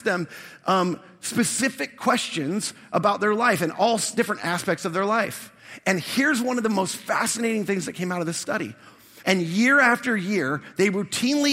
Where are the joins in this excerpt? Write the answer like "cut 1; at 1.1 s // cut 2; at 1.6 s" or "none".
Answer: cut 1; at 9.2 s